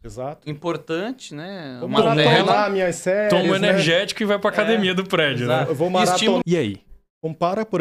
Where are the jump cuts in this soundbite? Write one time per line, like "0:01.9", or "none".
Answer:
0:06.4